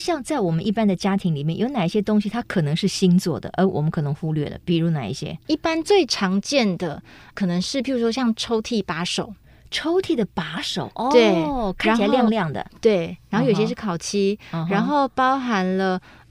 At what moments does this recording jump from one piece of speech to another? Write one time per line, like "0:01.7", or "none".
none

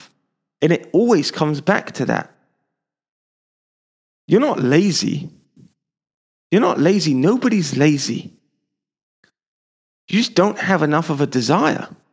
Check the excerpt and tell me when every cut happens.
none

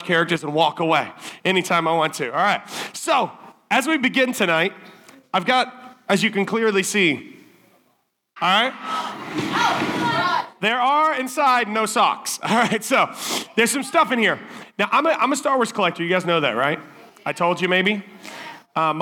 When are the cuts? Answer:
0:08.4

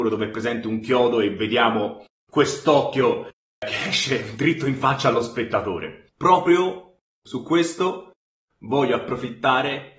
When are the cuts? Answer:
none

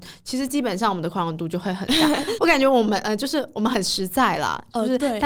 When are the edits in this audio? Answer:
0:02.4

